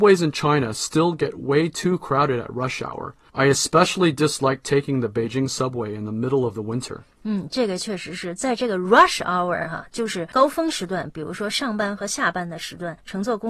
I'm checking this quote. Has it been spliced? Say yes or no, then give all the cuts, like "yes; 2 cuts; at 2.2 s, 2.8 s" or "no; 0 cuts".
no; 0 cuts